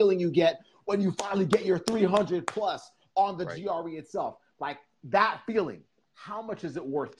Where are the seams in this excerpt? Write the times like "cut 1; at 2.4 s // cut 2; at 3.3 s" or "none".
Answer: none